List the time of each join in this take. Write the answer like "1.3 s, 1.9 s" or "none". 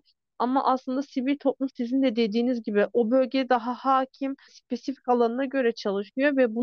4.5 s